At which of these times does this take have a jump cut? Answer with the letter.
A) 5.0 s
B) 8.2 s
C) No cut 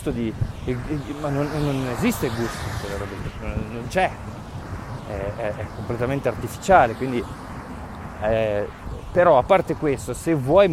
C